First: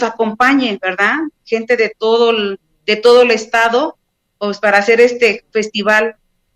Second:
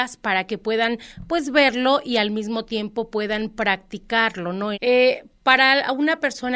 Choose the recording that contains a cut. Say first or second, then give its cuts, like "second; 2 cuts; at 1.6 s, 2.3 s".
second; 1 cut; at 4.7 s